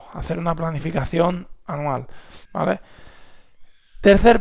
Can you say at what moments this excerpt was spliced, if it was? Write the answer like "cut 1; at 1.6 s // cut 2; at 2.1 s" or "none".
cut 1; at 2.5 s